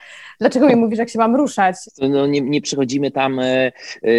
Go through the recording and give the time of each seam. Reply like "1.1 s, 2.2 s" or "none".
1.9 s